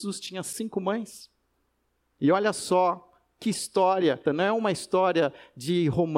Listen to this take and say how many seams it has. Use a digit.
2